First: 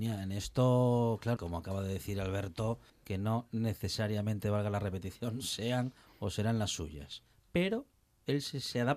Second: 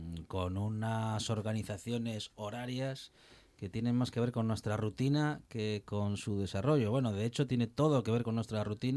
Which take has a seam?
first; 2 cuts; at 1.4 s, 2.9 s

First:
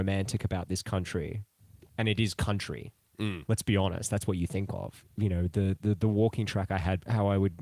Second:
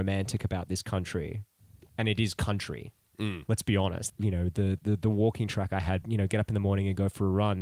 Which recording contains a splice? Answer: second; 2 cuts; at 4.1 s, 6.0 s

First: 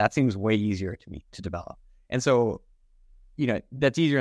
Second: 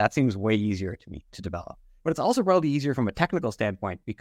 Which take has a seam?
second; 1 cut; at 2.0 s

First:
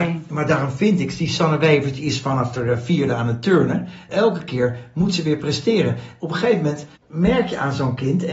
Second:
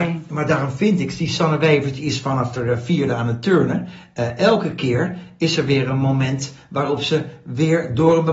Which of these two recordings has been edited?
first; 2 cuts; at 4.1 s, 7.0 s

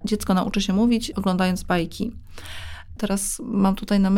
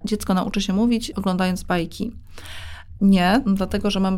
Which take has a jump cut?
first; 1 cut; at 3.0 s

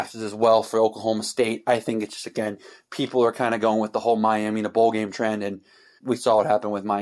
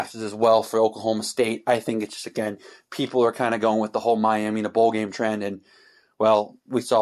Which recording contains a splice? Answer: first; 1 cut; at 6.0 s

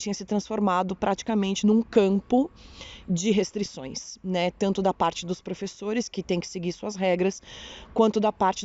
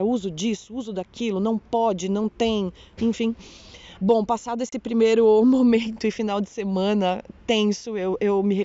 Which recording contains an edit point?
second; 1 cut; at 4.0 s

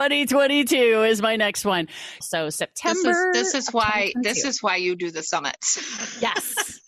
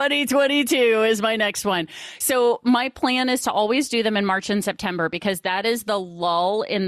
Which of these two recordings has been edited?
first; 1 cut; at 2.2 s

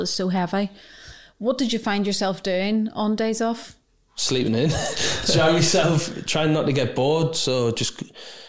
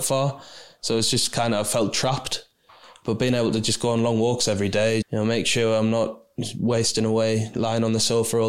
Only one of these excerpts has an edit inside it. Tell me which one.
second; 1 cut; at 5.0 s

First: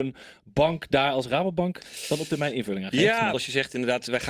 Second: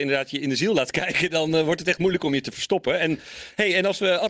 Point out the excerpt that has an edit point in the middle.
first; 1 cut; at 3.3 s

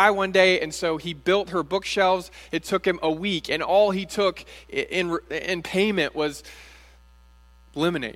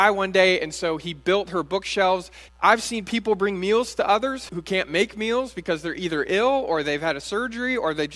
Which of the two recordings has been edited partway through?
second; 2 cuts; at 2.5 s, 4.5 s

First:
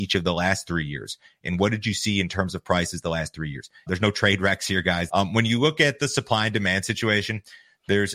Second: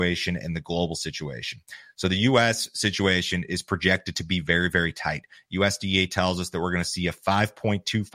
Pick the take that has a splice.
first; 2 cuts; at 3.9 s, 5.1 s

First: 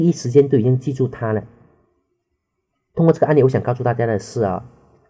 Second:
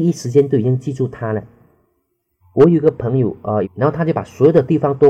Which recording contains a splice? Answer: second; 2 cuts; at 2.4 s, 3.6 s

